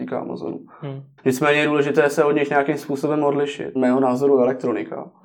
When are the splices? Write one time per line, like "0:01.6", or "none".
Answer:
0:01.2
0:03.7